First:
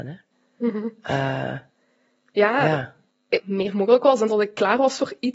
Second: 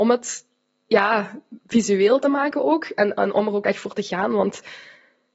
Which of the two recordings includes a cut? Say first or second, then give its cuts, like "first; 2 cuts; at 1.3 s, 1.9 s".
first; 1 cut; at 3.4 s